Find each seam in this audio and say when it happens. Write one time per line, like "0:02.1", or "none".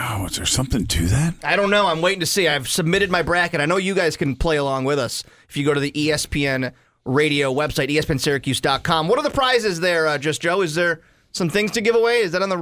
none